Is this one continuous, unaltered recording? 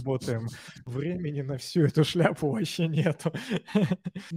yes; 0 cuts

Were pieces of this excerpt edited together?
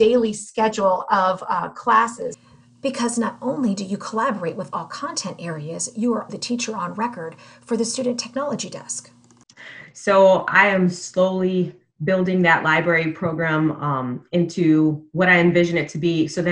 yes; 2 cuts; at 6.3 s, 9.9 s

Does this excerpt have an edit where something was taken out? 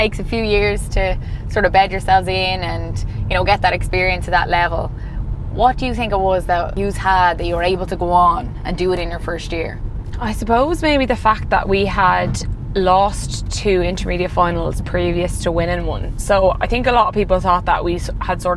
no; 0 cuts

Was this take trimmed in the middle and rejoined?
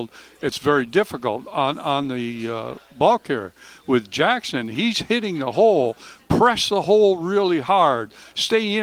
no; 0 cuts

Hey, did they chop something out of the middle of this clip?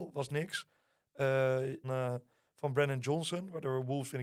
yes; 1 cut; at 1.8 s

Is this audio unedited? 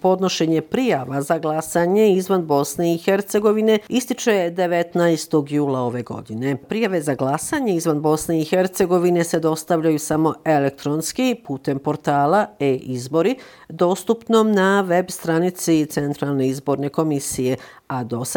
yes; 0 cuts

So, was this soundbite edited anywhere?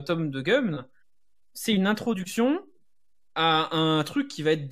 no; 0 cuts

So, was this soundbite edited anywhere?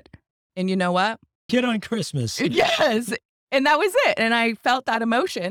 yes; 1 cut; at 1.5 s

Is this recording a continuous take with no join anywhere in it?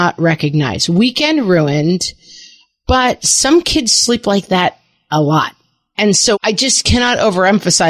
no; 1 cut; at 6.3 s

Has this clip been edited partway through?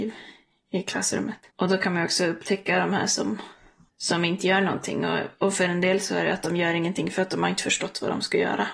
yes; 1 cut; at 1.5 s

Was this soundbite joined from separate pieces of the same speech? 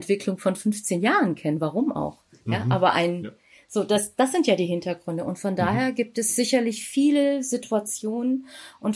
no; 0 cuts

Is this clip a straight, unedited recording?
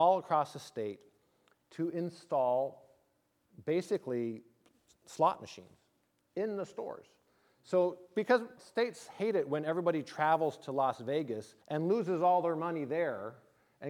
no; 2 cuts; at 8.6 s, 11.6 s

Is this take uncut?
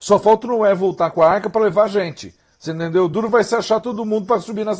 yes; 0 cuts

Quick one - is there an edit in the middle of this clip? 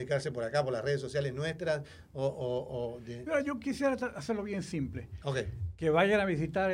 no; 0 cuts

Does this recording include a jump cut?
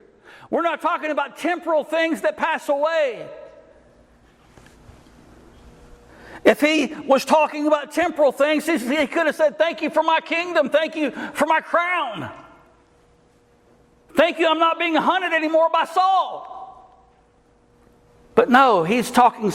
no; 0 cuts

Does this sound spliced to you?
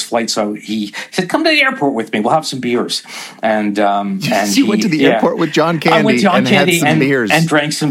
no; 0 cuts

